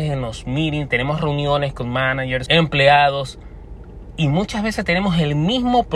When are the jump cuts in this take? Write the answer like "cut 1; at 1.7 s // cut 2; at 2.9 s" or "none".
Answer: cut 1; at 2.5 s